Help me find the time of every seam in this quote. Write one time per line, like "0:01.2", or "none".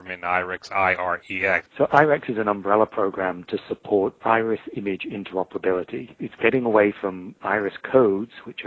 0:01.7